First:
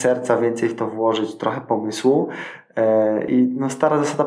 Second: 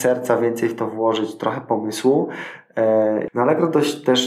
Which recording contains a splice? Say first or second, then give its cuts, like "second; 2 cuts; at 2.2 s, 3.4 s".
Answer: second; 1 cut; at 3.3 s